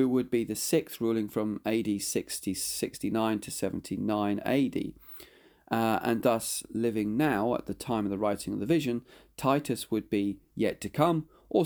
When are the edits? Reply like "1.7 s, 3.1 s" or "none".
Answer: none